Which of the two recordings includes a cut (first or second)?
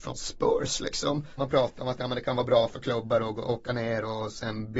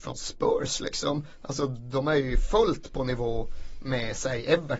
first